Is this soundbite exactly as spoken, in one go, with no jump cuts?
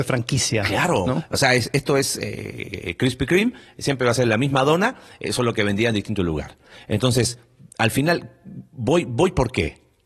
yes; 0 cuts

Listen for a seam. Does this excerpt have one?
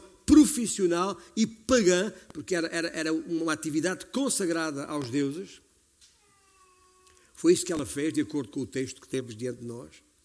no; 0 cuts

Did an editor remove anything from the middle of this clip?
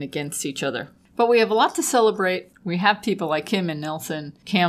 no; 0 cuts

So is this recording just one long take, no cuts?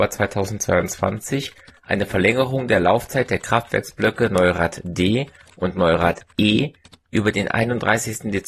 yes; 0 cuts

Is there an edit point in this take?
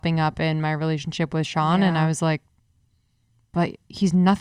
no; 0 cuts

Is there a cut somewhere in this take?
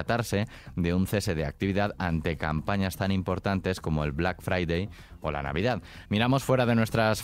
yes; 1 cut; at 6.0 s

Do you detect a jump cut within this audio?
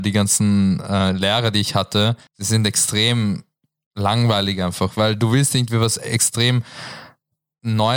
yes; 1 cut; at 2.3 s

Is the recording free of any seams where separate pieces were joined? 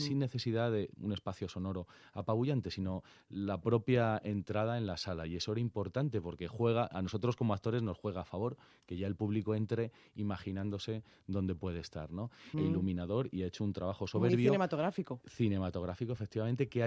no; 1 cut; at 12.5 s

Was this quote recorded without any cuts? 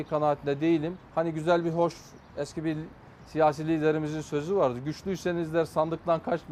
no; 1 cut; at 1.0 s

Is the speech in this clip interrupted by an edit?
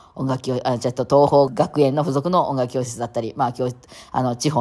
yes; 1 cut; at 1.5 s

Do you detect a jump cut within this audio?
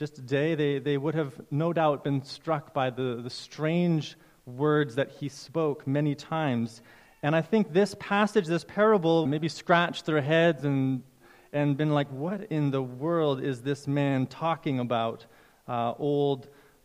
yes; 1 cut; at 9.3 s

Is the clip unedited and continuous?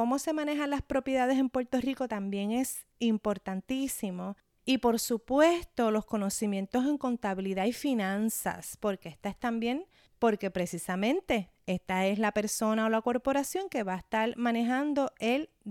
yes; 0 cuts

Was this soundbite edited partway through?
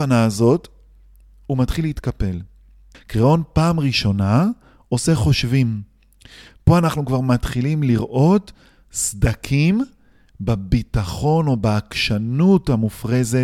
yes; 1 cut; at 2.9 s

